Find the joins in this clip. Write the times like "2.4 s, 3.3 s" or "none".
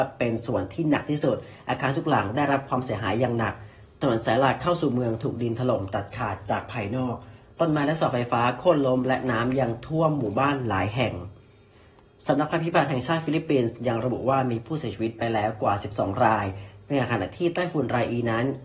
none